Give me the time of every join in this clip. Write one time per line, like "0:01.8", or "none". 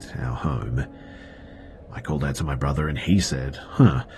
0:01.8